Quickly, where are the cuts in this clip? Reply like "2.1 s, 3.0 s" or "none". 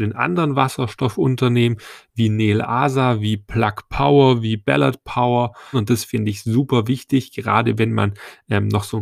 5.7 s